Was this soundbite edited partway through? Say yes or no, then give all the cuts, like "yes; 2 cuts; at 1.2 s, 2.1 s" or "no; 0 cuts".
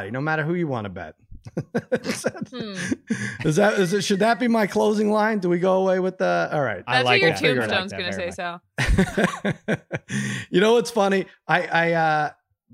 no; 0 cuts